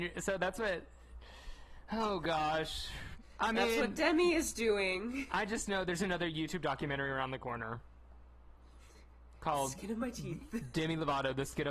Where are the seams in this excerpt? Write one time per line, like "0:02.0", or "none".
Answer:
none